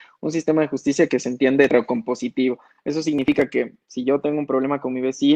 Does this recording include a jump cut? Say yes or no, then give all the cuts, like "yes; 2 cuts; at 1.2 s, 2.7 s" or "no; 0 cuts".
no; 0 cuts